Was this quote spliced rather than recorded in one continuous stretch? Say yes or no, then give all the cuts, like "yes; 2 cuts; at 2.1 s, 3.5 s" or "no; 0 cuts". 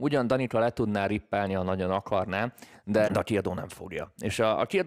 yes; 1 cut; at 3.0 s